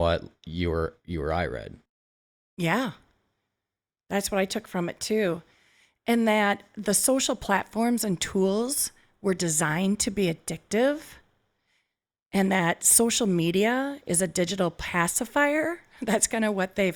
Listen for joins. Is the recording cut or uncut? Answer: uncut